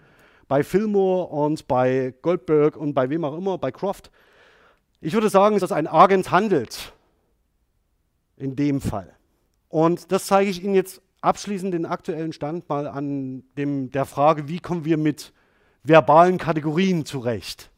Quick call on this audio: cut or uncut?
cut